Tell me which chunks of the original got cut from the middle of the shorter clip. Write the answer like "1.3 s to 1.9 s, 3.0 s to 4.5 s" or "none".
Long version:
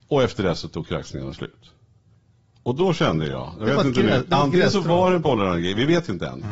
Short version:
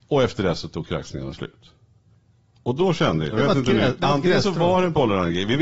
3.3 s to 3.6 s